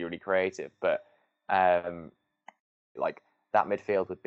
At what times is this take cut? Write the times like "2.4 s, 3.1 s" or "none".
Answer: 3.0 s